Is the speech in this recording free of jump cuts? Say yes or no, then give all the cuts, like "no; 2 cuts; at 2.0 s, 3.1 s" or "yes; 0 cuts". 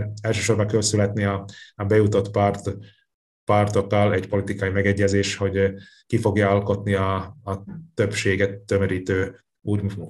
yes; 0 cuts